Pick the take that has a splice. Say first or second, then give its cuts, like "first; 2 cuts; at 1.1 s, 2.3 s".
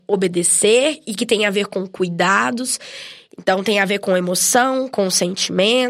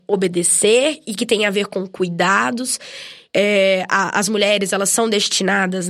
second; 1 cut; at 3.3 s